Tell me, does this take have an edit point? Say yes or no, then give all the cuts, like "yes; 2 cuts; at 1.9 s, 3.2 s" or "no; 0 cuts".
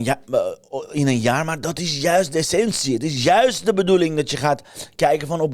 no; 0 cuts